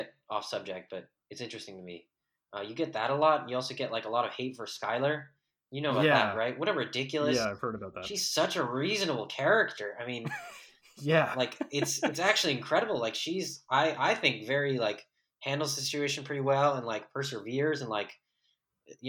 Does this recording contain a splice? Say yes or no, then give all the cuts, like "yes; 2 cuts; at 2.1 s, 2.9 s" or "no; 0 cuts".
no; 0 cuts